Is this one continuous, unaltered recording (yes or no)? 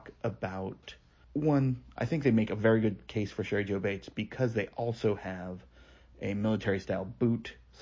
yes